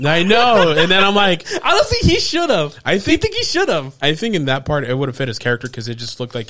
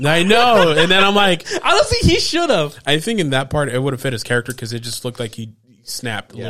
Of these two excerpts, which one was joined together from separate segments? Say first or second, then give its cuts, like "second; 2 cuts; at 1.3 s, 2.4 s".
second; 1 cut; at 2.8 s